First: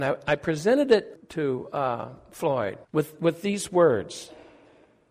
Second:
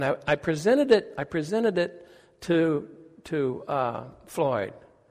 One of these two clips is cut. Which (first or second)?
first